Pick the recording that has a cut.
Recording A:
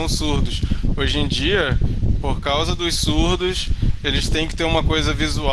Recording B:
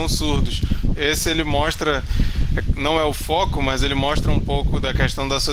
B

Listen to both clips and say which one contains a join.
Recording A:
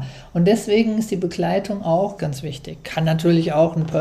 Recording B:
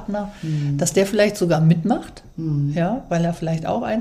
A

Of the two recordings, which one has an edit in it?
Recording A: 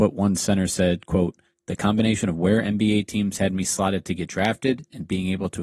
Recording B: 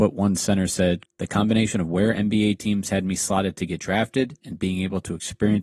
B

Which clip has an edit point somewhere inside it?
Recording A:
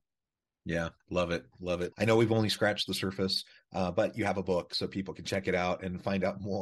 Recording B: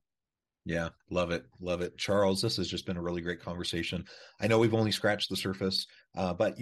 A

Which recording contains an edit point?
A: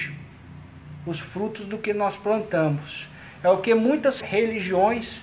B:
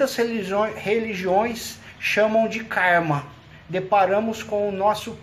A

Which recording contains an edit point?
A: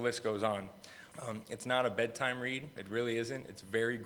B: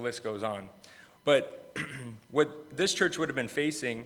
A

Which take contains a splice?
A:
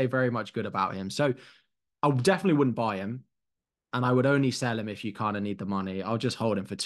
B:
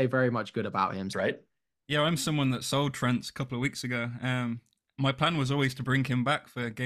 B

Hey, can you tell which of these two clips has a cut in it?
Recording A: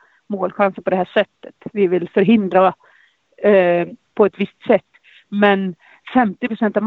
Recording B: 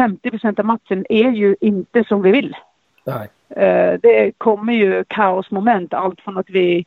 A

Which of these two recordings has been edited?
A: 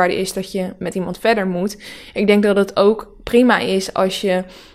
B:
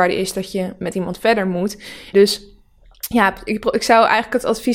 B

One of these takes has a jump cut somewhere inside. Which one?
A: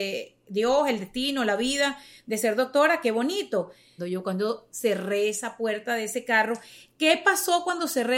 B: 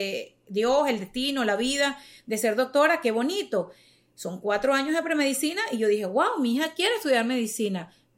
A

